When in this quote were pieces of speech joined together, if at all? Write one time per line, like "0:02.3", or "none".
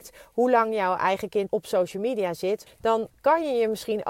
0:01.5
0:02.7